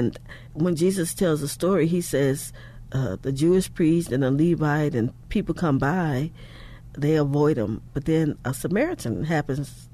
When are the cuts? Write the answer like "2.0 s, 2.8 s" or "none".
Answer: 6.9 s